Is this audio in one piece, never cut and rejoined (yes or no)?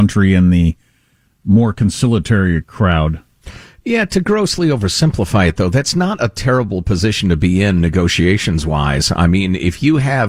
yes